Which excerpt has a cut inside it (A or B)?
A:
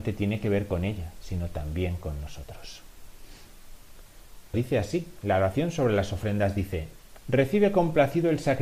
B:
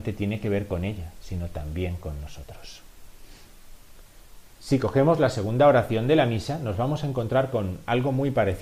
A